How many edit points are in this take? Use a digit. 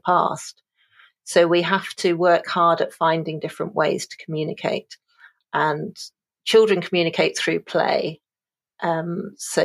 1